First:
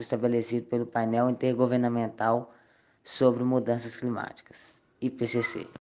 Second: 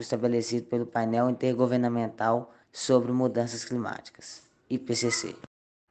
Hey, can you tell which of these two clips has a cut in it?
second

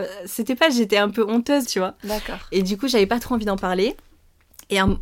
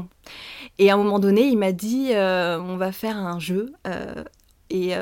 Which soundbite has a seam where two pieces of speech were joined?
first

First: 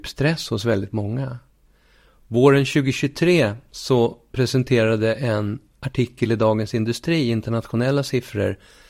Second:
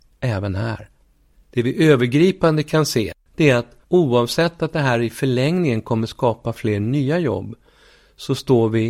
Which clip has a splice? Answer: second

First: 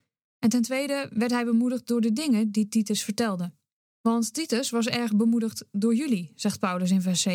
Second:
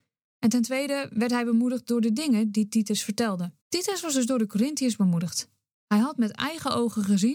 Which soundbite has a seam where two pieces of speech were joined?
second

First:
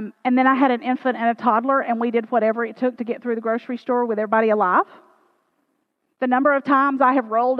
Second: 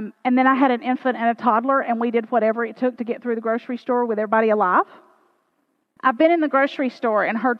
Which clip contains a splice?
second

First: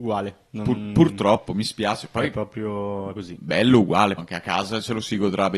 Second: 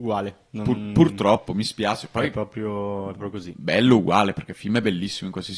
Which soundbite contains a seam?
first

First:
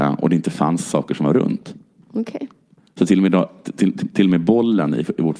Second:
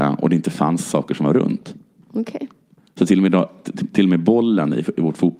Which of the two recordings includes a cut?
second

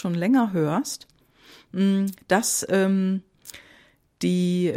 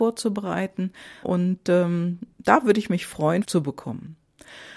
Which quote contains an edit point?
second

